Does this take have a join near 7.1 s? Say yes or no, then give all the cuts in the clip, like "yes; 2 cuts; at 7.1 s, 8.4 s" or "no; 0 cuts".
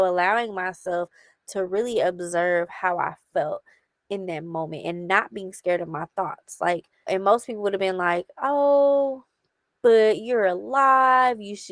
yes; 1 cut; at 7.1 s